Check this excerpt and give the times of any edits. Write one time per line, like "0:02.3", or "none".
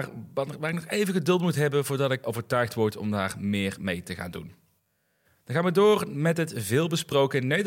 0:02.2